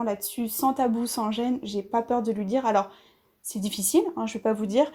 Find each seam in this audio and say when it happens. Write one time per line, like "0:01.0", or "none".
none